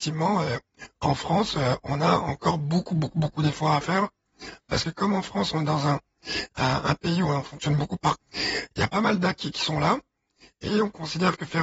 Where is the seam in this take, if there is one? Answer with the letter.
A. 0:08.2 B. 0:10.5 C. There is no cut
A